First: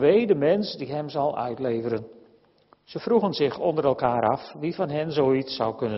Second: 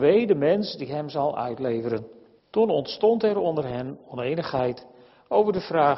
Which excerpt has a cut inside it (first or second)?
second